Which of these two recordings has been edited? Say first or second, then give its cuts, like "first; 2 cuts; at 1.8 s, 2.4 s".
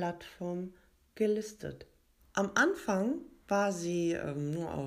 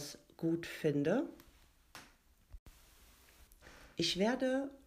first; 2 cuts; at 2.2 s, 3.4 s